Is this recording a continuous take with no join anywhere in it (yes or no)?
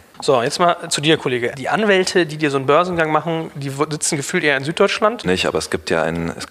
no